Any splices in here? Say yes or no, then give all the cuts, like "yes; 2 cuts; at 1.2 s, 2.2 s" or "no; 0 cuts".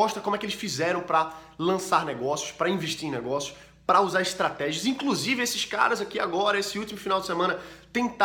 no; 0 cuts